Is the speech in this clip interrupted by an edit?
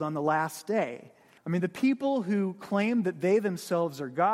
yes; 1 cut; at 1.4 s

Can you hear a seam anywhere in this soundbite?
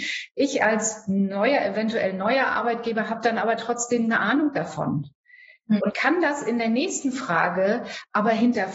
yes; 1 cut; at 5.8 s

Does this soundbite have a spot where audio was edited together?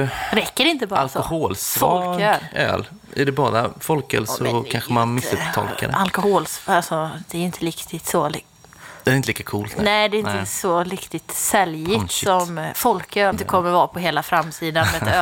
yes; 1 cut; at 13.3 s

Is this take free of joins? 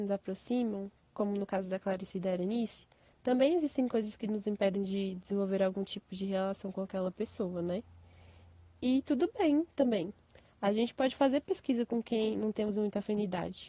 yes; 0 cuts

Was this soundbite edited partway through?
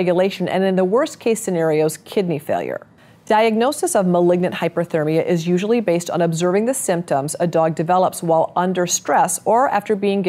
no; 0 cuts

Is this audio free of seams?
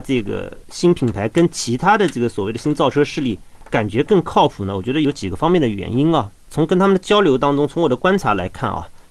yes; 0 cuts

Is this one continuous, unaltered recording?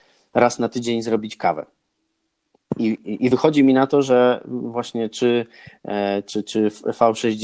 yes; 0 cuts

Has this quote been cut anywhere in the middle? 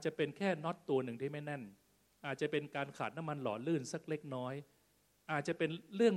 no; 0 cuts

